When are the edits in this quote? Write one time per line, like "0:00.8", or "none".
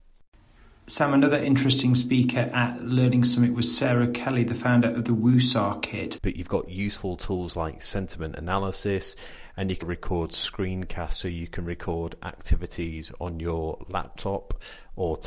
0:06.2
0:09.8